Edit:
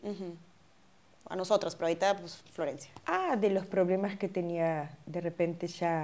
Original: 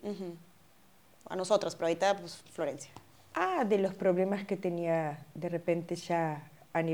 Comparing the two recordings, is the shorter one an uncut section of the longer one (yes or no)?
no